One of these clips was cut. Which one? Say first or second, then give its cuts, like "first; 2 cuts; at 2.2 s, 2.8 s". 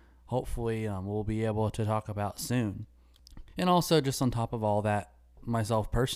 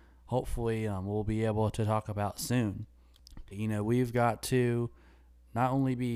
second; 1 cut; at 3.5 s